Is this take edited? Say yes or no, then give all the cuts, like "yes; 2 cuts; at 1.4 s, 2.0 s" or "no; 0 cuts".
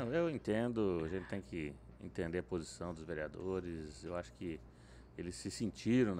no; 0 cuts